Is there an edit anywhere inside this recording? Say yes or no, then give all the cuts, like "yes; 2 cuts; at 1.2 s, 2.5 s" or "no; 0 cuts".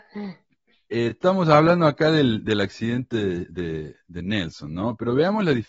no; 0 cuts